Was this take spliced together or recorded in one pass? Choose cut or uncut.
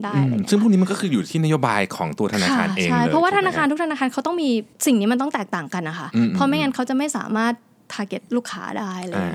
cut